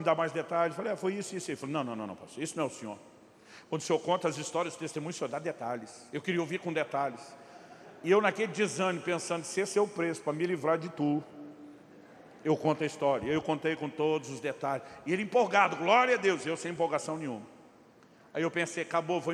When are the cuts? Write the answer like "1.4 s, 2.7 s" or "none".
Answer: none